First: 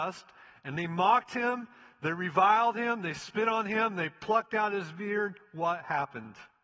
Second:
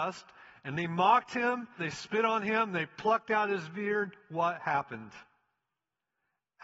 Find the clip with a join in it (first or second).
second